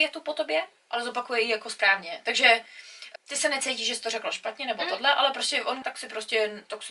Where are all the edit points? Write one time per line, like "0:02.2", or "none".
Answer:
0:03.2
0:05.8